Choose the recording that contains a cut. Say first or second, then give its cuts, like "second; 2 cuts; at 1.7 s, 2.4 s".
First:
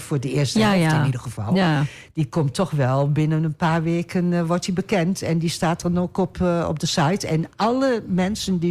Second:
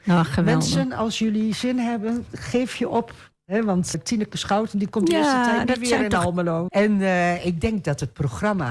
second; 2 cuts; at 3.9 s, 6.7 s